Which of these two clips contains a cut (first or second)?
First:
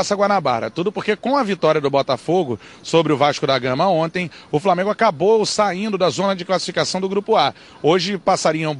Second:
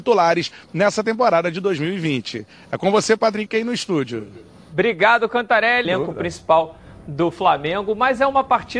second